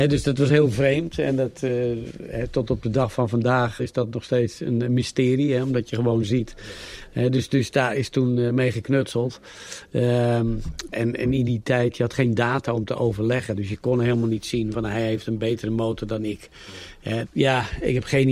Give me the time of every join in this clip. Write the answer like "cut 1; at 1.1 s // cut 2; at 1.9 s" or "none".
cut 1; at 3.8 s // cut 2; at 10.9 s // cut 3; at 17.2 s